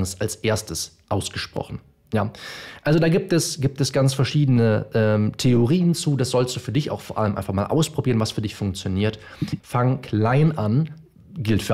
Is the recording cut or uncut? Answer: cut